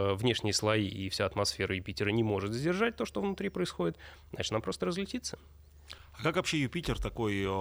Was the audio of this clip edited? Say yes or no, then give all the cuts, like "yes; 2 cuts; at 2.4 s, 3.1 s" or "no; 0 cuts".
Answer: no; 0 cuts